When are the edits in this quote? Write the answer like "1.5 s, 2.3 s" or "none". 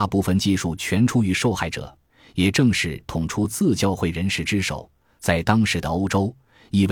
3.1 s